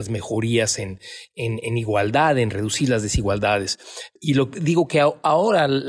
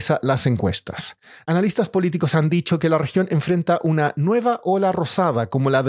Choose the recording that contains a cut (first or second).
first